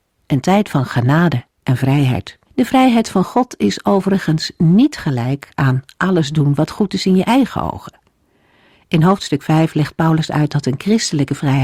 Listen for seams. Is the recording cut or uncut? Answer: cut